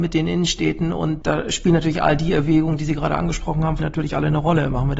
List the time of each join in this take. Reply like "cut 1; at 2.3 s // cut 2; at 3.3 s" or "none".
cut 1; at 1.2 s // cut 2; at 3.8 s